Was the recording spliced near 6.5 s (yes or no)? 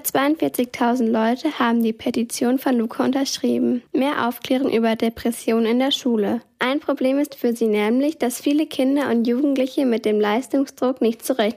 no